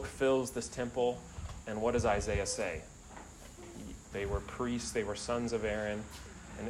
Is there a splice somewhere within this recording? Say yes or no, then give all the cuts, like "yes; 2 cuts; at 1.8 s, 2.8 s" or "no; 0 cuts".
yes; 1 cut; at 4.1 s